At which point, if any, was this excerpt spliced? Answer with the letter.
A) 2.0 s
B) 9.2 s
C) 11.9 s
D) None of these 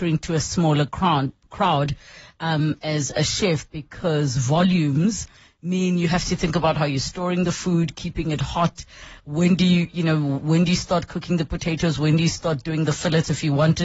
D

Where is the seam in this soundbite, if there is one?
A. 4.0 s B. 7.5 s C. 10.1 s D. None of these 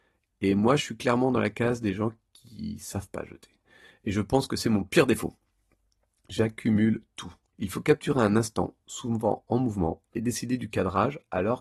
B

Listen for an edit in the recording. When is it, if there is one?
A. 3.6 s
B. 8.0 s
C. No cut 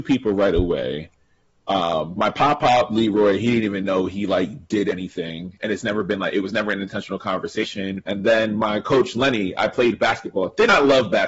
B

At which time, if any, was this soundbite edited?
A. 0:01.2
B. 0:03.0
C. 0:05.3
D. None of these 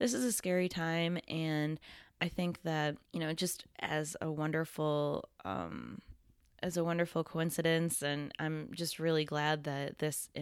B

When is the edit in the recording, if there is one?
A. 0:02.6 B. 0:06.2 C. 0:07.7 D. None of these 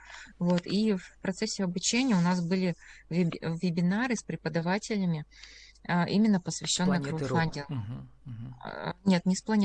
D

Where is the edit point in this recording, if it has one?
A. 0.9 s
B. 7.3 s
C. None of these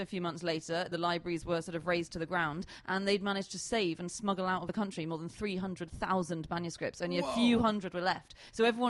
A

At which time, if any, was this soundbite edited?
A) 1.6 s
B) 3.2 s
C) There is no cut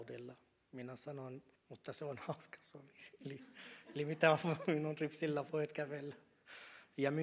A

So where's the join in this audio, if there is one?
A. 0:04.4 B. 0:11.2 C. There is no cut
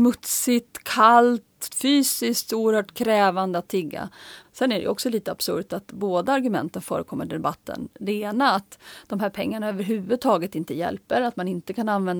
A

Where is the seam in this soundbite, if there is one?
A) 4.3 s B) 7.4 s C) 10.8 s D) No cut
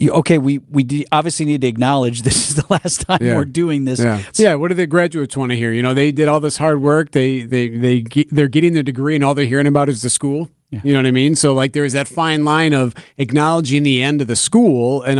A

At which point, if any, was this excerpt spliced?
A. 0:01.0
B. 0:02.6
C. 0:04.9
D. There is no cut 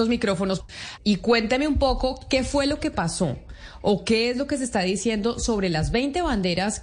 A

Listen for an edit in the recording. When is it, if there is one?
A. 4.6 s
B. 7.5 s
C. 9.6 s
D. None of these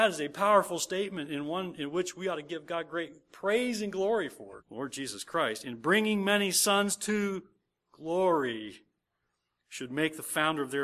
A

